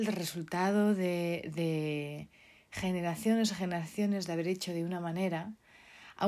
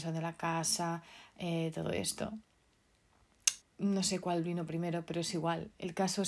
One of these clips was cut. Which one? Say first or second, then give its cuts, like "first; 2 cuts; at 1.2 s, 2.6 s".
second; 1 cut; at 3.6 s